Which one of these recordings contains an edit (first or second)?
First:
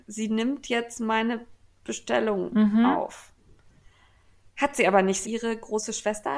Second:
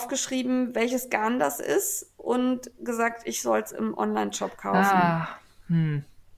first